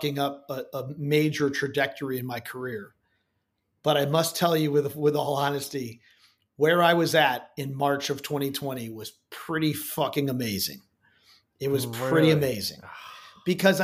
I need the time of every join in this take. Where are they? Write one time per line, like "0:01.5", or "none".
none